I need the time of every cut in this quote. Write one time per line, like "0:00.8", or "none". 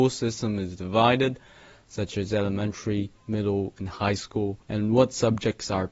0:04.6